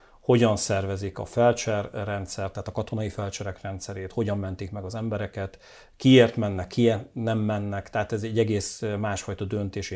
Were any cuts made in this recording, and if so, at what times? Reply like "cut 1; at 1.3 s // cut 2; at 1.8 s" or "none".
none